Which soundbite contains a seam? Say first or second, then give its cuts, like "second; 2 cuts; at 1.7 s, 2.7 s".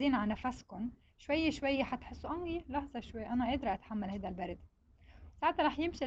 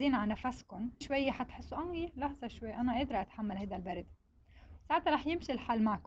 second; 1 cut; at 1.0 s